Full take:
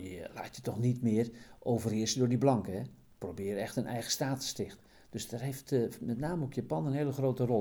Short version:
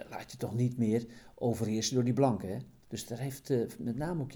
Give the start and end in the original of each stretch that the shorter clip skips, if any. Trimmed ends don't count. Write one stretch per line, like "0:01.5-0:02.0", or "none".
0:03.1-0:05.0